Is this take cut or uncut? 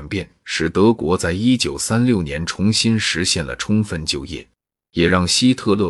uncut